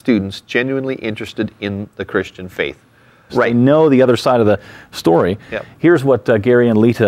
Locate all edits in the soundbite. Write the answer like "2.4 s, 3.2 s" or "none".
3.3 s